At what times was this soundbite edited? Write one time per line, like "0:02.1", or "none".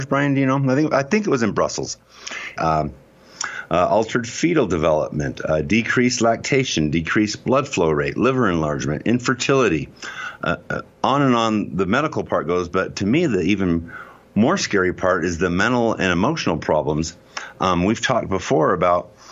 0:02.6